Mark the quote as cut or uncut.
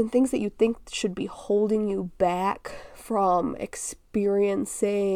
uncut